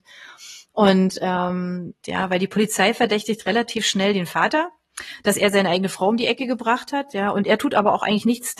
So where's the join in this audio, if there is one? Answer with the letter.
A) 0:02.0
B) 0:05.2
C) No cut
A